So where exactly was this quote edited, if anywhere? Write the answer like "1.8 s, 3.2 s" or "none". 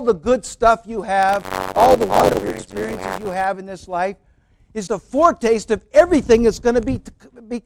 2.4 s, 4.9 s

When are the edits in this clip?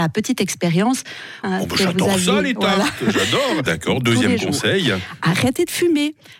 1.4 s, 3.7 s

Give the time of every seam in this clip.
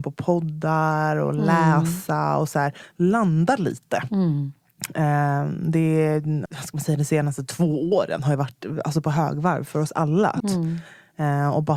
6.5 s, 10.4 s

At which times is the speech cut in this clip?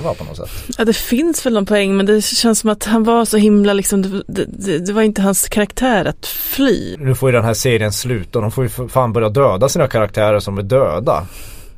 7.0 s

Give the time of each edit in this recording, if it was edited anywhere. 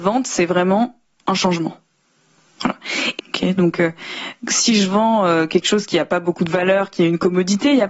3.2 s

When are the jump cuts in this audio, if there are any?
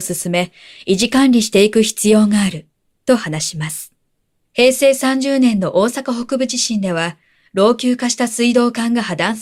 4.4 s

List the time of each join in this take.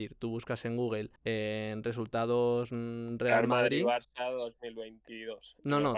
1.2 s

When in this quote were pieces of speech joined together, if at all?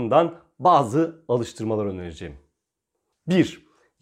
3.1 s

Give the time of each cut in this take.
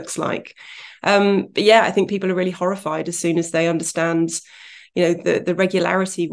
none

